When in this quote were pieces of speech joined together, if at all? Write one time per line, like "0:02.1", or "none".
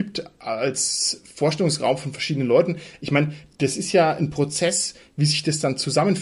none